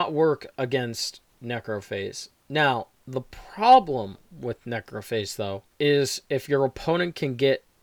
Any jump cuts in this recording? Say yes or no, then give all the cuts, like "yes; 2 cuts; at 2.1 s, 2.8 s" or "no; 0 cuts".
yes; 1 cut; at 5.7 s